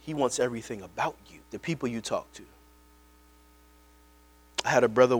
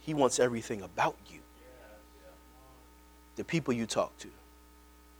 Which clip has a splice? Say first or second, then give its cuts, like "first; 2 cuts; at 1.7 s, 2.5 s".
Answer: first; 1 cut; at 1.4 s